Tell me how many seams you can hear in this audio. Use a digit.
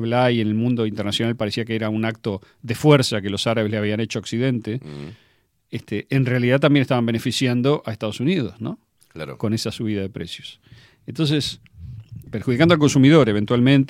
1